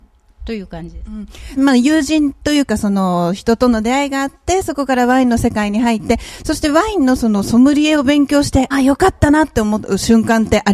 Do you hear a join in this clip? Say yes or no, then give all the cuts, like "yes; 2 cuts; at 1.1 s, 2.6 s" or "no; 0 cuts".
yes; 2 cuts; at 1.6 s, 8.7 s